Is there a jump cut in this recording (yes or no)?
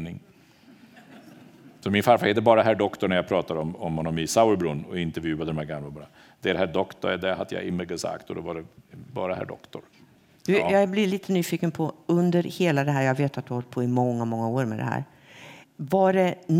no